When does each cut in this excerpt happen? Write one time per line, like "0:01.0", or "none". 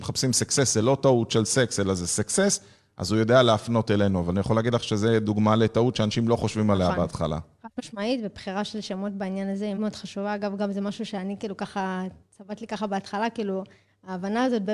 0:09.8